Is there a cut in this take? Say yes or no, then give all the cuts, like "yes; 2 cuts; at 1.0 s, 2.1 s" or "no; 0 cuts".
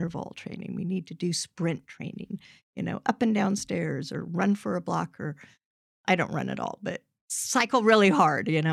no; 0 cuts